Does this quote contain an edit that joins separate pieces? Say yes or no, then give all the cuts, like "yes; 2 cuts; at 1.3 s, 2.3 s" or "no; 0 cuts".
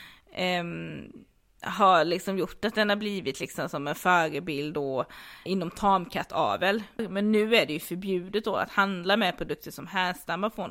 yes; 2 cuts; at 5.5 s, 7.0 s